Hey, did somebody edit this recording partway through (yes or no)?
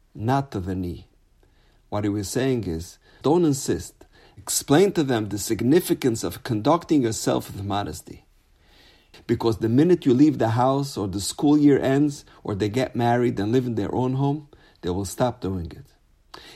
yes